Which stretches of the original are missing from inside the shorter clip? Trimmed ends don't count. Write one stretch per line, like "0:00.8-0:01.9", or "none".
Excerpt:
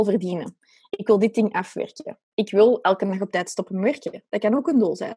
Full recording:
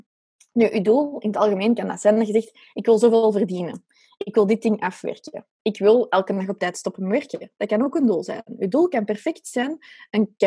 none